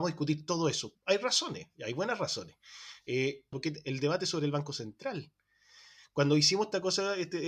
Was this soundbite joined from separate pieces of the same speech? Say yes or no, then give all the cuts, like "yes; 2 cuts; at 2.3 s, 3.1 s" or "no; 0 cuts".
yes; 2 cuts; at 0.9 s, 3.5 s